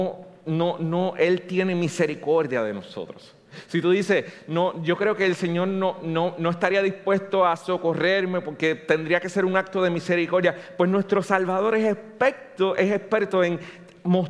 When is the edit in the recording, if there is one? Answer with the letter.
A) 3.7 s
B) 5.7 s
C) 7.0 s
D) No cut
D